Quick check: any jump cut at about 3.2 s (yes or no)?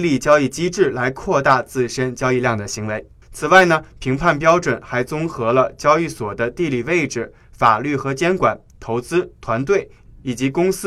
yes